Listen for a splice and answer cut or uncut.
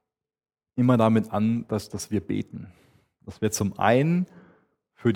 uncut